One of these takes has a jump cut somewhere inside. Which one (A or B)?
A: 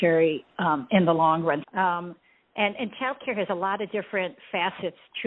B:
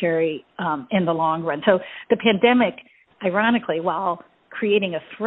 A